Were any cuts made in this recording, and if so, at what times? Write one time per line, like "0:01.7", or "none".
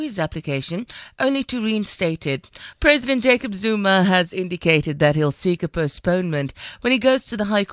0:02.7